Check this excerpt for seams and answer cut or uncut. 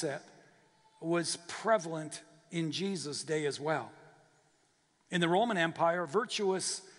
uncut